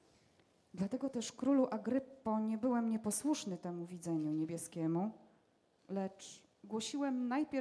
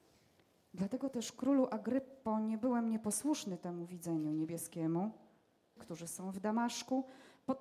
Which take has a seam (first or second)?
second